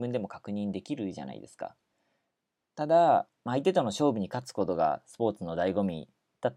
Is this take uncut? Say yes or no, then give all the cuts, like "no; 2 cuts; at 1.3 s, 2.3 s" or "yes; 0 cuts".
no; 1 cut; at 2.6 s